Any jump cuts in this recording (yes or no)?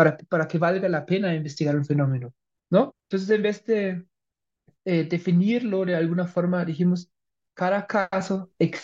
yes